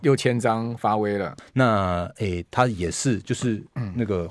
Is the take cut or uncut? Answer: cut